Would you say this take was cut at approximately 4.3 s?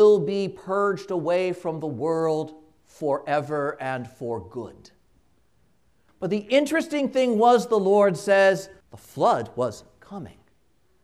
no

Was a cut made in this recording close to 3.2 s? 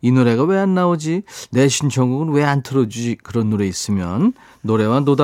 no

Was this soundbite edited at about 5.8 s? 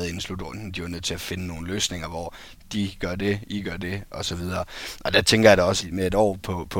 yes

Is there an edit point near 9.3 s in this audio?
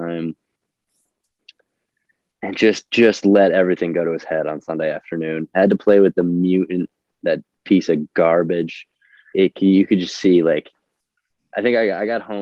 yes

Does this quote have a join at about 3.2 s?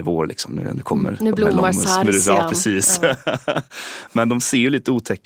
no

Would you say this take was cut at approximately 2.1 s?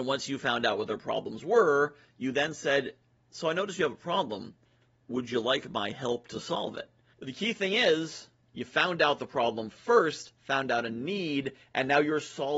no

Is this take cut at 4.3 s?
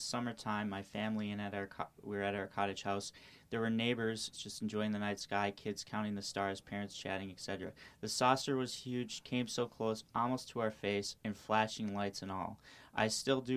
yes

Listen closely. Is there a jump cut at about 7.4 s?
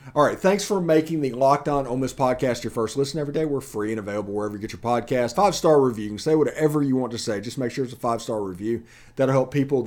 no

